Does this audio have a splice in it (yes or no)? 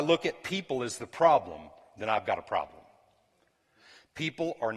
no